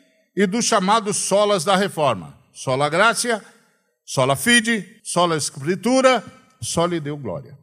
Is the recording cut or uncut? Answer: cut